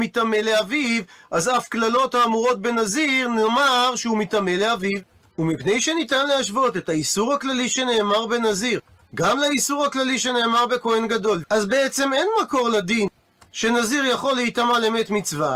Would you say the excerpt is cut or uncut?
cut